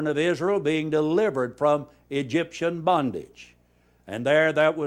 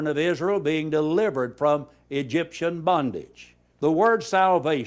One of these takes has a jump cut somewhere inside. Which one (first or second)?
second